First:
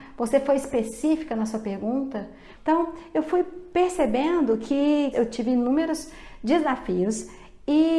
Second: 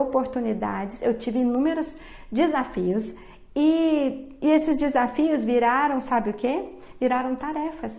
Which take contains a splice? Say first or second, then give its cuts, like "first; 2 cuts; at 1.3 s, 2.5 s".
first; 2 cuts; at 2.5 s, 5.1 s